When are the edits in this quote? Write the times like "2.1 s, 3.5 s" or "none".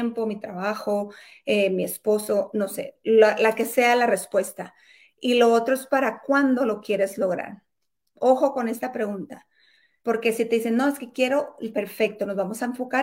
10.0 s, 11.7 s

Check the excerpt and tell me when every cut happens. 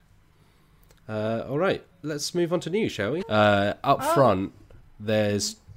1.9 s, 3.2 s

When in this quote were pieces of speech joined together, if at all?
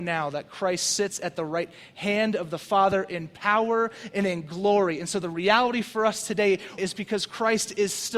6.8 s

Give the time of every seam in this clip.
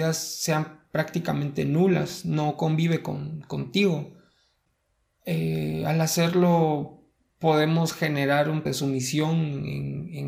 5.1 s, 8.7 s

